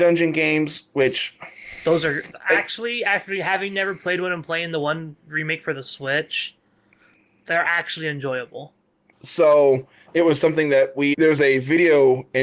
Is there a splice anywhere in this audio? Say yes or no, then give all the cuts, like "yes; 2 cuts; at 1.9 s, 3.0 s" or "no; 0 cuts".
yes; 2 cuts; at 9.1 s, 11.1 s